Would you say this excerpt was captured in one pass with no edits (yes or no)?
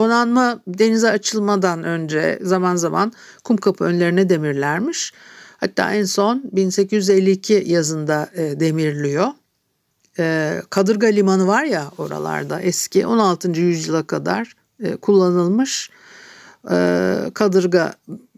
yes